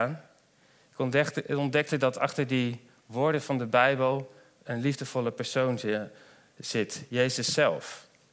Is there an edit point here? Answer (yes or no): no